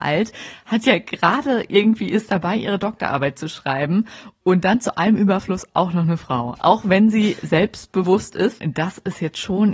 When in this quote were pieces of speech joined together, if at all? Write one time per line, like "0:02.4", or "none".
0:06.6
0:08.6